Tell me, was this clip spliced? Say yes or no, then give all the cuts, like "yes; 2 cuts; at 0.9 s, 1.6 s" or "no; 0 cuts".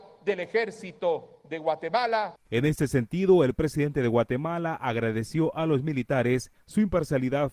yes; 1 cut; at 2.5 s